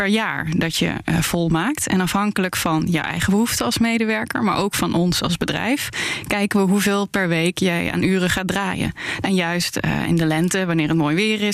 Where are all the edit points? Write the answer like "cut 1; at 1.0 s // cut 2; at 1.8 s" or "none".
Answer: cut 1; at 9.2 s